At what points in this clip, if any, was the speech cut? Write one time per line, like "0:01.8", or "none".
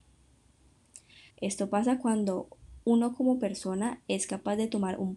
0:01.3
0:02.8